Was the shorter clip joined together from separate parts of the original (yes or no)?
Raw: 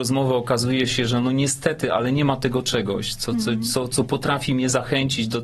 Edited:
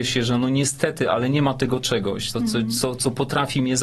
yes